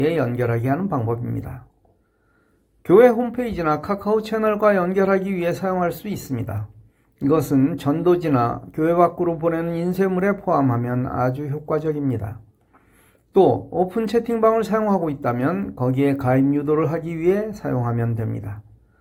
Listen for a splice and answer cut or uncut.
uncut